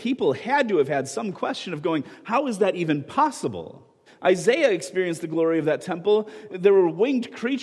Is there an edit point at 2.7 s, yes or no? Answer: no